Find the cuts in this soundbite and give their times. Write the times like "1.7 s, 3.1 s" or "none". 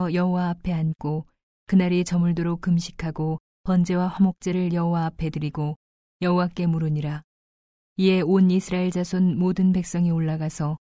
7.7 s